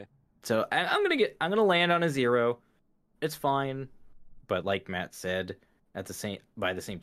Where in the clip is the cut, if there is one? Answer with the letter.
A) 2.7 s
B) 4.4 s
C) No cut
B